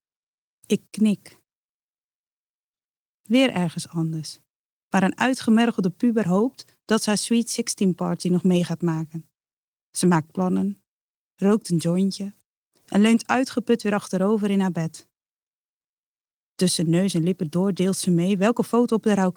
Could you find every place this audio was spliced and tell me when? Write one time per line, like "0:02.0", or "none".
none

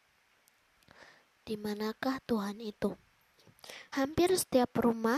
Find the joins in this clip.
0:03.9

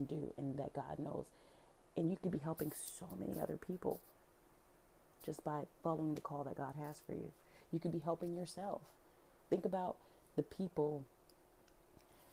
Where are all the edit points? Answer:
none

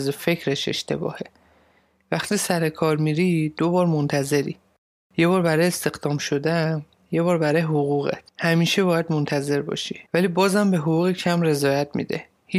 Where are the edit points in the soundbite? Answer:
0:08.3
0:10.1

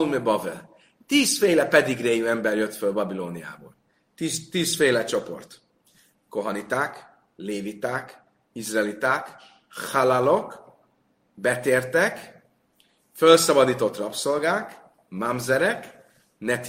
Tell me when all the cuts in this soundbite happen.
none

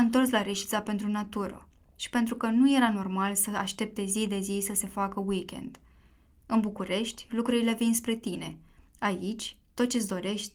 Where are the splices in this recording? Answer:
none

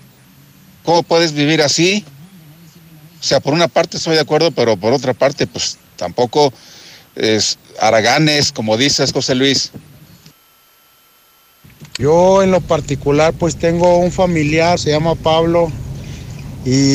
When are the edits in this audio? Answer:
0:12.0
0:14.8

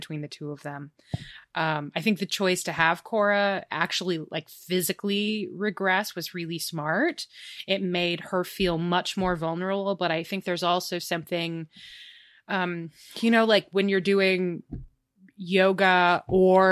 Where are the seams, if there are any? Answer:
none

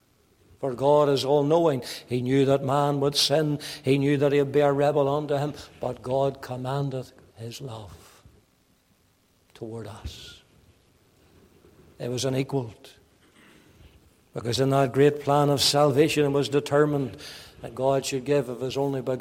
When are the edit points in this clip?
none

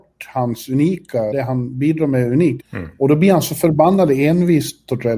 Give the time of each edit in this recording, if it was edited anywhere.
0:01.3
0:02.6

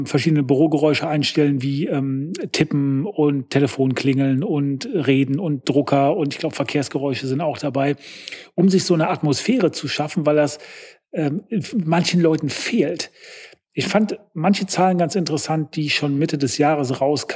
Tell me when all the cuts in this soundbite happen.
none

